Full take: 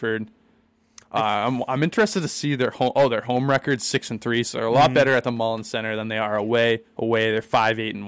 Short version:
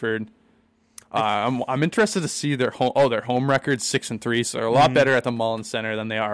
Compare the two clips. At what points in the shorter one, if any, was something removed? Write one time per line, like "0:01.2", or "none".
none